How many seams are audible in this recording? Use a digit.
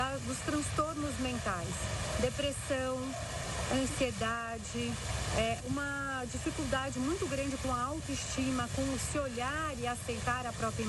1